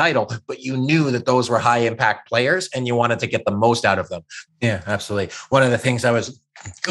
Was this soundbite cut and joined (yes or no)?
yes